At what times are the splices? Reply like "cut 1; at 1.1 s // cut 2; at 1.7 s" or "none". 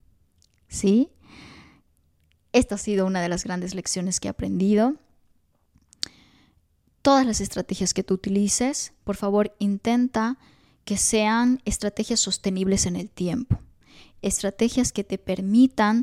none